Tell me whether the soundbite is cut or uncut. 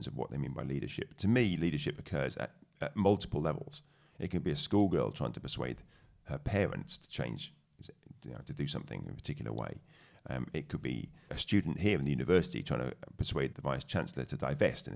cut